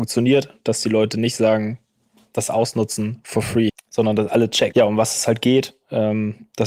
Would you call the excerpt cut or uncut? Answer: cut